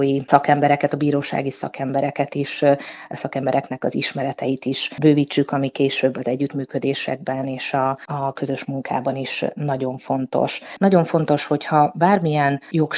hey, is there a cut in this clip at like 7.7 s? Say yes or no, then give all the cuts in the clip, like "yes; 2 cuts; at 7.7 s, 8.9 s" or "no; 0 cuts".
no; 1 cut; at 10.8 s